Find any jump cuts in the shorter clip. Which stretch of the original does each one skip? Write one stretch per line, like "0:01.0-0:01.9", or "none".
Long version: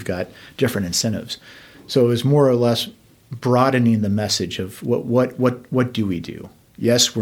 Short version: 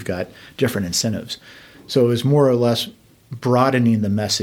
none